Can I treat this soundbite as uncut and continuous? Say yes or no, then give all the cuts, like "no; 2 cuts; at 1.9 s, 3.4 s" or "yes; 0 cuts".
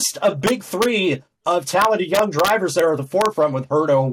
yes; 0 cuts